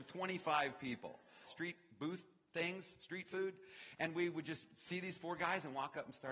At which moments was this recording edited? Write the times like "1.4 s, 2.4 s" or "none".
1.4 s